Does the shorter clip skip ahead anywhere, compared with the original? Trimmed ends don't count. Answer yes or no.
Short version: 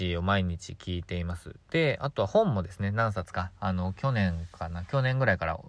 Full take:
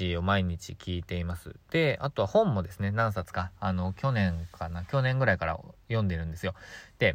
no